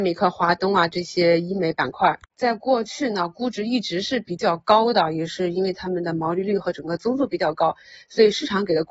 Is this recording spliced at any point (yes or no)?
no